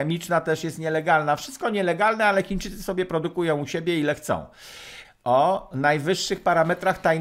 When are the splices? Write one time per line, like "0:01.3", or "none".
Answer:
0:05.0